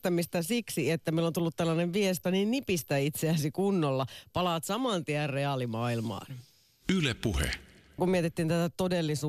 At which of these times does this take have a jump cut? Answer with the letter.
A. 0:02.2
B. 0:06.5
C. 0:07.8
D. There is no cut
A